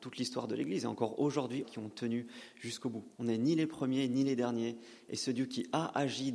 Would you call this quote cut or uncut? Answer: cut